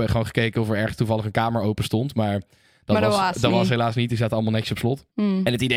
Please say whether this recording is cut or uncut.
uncut